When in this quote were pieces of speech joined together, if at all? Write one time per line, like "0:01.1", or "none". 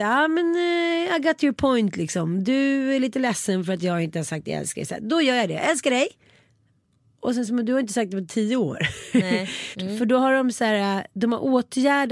0:09.7